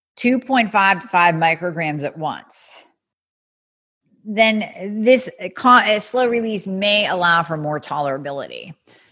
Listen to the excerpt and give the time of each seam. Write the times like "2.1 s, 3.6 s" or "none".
none